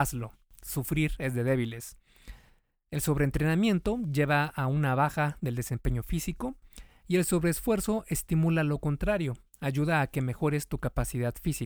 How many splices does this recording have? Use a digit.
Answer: 0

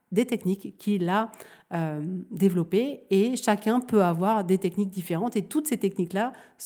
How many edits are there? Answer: 0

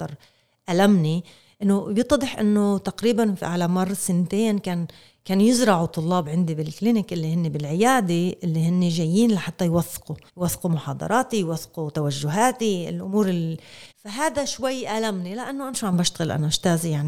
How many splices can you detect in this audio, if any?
2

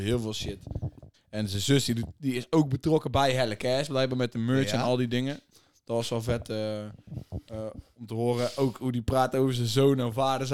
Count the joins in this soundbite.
1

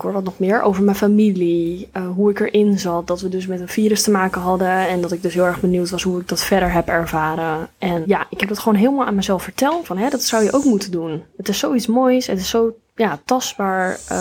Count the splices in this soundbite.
2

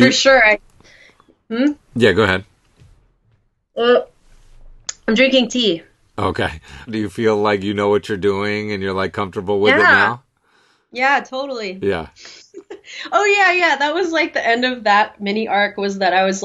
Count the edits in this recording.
1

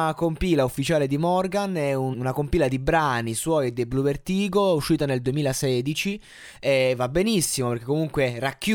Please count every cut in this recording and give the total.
1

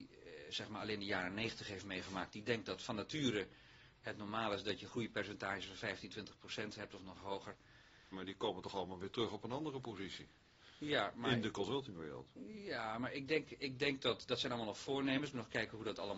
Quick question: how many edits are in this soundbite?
1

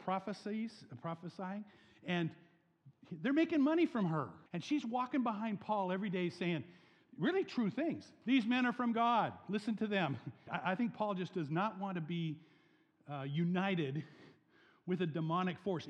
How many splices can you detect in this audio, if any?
2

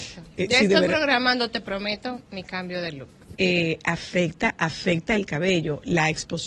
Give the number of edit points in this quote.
1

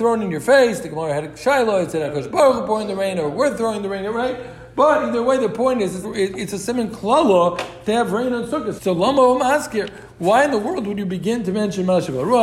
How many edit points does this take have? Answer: 2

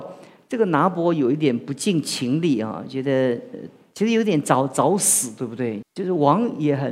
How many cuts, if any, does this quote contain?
1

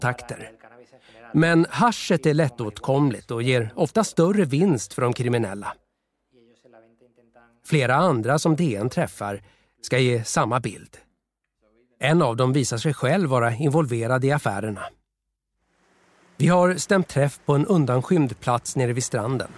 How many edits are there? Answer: 0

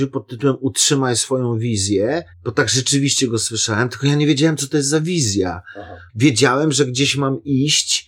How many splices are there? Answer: 2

